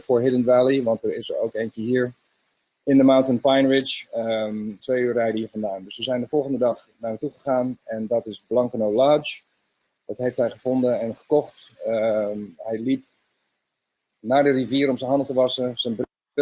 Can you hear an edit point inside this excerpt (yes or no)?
yes